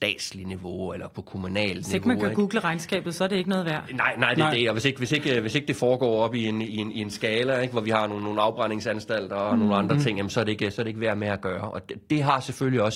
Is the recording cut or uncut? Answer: uncut